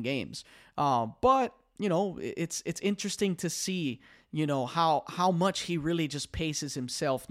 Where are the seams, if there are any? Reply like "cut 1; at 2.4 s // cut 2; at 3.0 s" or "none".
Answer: none